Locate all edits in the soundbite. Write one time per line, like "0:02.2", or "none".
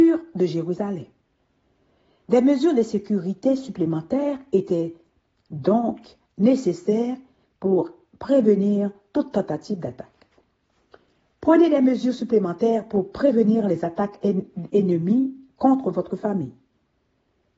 0:14.7